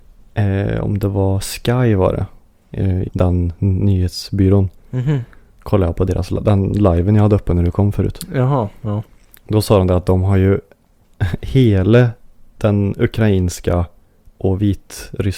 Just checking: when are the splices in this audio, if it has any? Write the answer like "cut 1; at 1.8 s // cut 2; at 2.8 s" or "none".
cut 1; at 3.1 s